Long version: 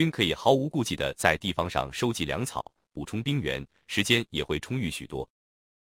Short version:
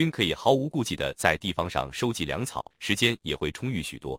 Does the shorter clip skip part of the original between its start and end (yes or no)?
yes